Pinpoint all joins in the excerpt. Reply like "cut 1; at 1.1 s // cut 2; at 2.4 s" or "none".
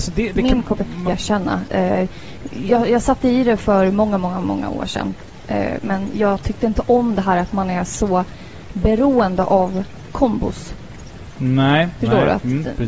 cut 1; at 1.1 s